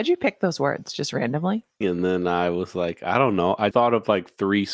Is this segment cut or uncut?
cut